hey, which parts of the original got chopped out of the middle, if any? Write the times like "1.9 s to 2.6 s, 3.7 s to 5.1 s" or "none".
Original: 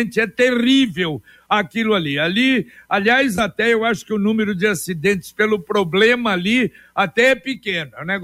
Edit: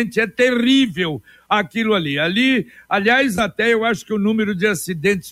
none